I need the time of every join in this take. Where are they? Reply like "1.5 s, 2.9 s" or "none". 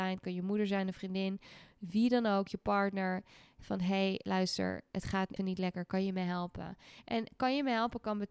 5.4 s